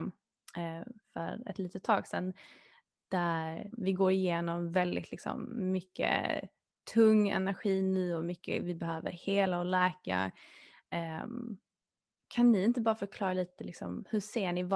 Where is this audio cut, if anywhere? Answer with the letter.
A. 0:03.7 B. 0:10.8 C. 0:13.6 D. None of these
A